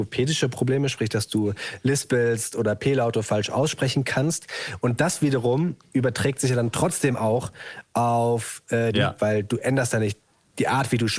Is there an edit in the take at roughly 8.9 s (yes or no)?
yes